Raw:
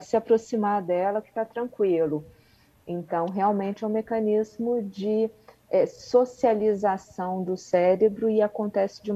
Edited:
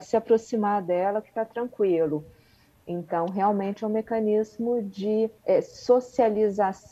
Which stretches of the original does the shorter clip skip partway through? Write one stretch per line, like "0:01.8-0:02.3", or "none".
0:05.4-0:05.6